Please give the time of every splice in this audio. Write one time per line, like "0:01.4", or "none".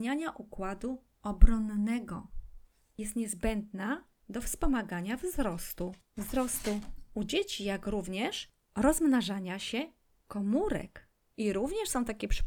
0:11.3